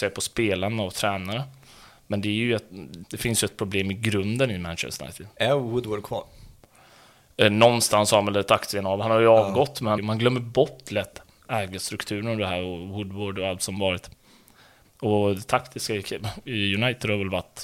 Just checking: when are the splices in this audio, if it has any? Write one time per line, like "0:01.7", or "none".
0:03.0
0:10.0
0:14.8